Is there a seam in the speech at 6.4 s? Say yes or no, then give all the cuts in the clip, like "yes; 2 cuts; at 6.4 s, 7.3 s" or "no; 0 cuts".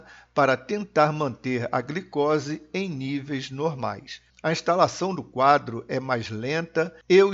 no; 1 cut; at 4.3 s